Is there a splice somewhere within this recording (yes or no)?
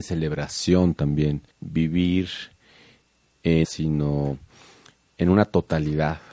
yes